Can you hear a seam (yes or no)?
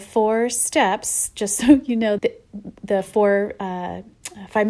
yes